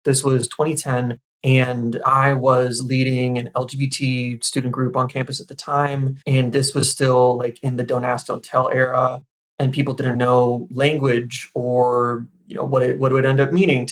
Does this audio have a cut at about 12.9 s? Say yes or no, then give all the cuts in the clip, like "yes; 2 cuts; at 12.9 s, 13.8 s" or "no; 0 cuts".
no; 2 cuts; at 6.2 s, 10.1 s